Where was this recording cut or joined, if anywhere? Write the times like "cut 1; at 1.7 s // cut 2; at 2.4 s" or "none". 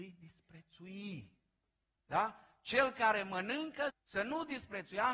cut 1; at 2.0 s // cut 2; at 3.9 s

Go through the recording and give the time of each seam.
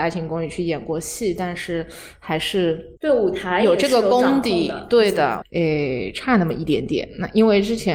cut 1; at 3.0 s // cut 2; at 5.4 s

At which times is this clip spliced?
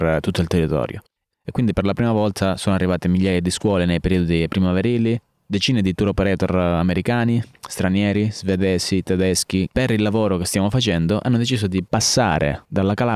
cut 1; at 1.3 s // cut 2; at 9.7 s

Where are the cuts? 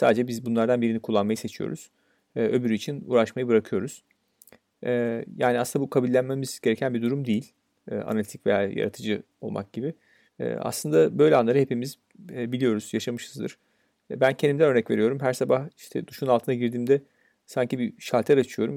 cut 1; at 10.3 s // cut 2; at 13.9 s

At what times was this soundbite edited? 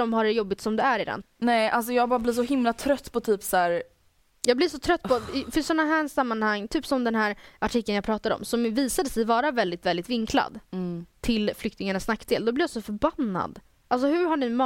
cut 1; at 1.2 s

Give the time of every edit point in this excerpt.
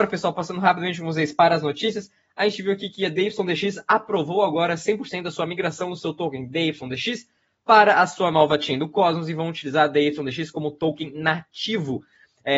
none

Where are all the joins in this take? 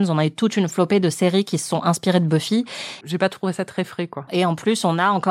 cut 1; at 3.0 s // cut 2; at 4.3 s

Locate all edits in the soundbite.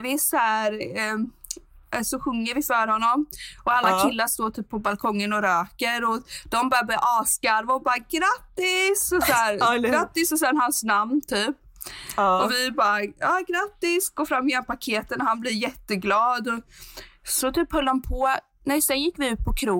none

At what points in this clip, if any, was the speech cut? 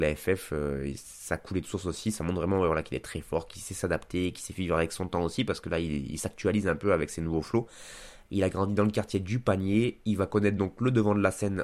cut 1; at 8.3 s

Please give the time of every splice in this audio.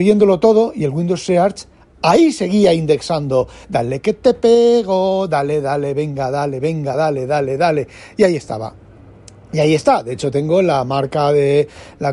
none

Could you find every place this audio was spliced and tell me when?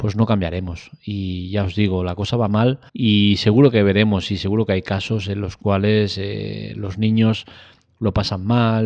cut 1; at 2.9 s

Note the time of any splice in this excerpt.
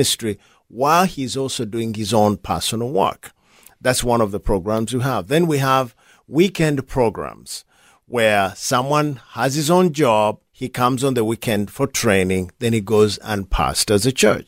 cut 1; at 10.5 s

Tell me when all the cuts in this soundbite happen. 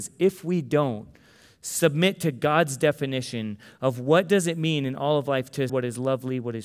cut 1; at 5.7 s

